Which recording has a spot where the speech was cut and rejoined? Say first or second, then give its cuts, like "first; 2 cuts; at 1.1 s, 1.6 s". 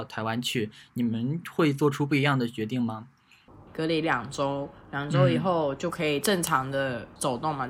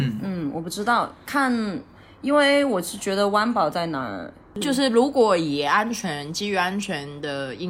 first; 1 cut; at 3.7 s